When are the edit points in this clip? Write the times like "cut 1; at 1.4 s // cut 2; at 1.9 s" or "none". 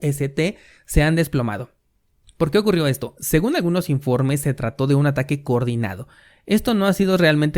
none